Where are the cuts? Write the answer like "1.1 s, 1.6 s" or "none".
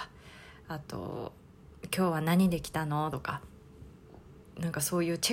none